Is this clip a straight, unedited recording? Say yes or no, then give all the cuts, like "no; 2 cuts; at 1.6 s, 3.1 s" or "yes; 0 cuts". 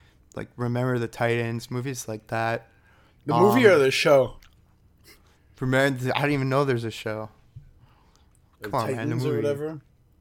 yes; 0 cuts